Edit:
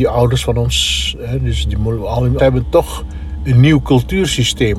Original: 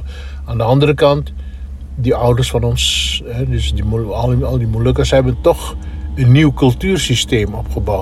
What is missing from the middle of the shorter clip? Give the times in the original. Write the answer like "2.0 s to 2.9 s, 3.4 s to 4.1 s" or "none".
4.5 s to 5.1 s